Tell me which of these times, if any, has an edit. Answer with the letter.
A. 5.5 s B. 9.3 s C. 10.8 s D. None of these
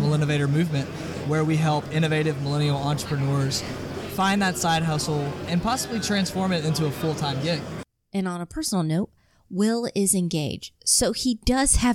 A